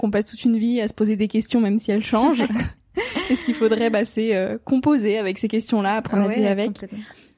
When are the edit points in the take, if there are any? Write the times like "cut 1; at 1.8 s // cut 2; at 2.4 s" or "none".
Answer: none